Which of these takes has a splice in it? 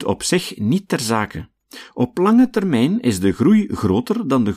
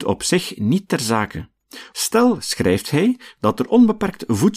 second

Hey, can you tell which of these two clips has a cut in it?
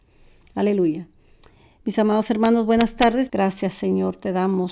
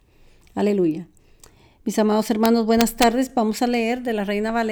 first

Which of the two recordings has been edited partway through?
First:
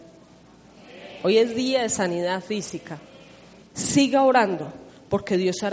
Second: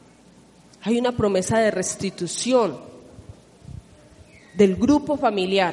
first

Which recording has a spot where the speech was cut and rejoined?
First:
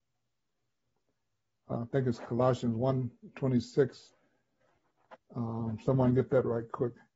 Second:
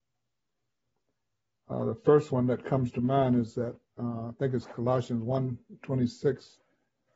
first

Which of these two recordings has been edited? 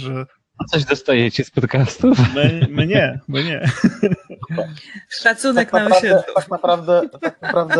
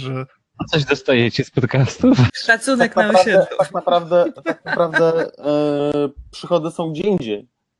second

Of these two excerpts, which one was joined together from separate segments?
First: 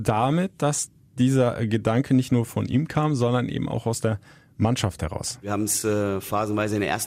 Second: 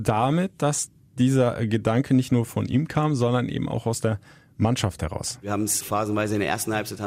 second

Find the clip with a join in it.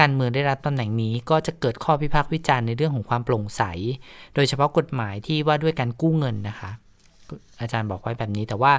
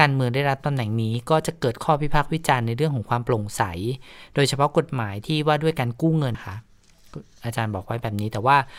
second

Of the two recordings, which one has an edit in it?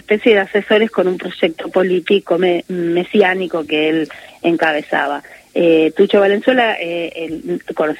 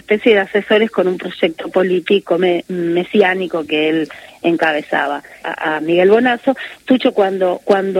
second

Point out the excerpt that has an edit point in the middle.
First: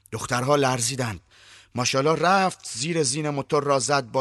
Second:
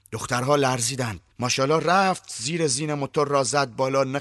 second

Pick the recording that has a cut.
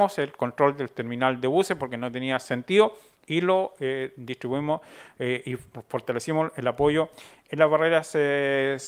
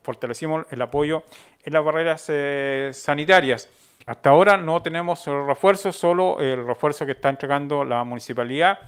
second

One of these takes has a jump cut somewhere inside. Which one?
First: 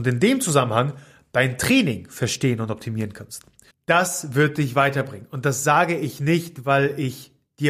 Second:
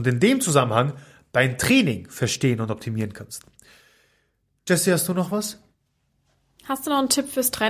first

